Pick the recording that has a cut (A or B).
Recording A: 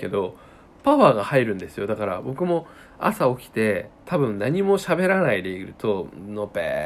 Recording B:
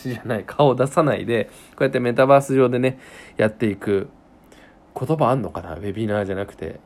A